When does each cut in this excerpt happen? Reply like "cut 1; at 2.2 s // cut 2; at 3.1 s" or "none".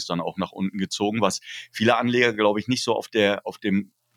none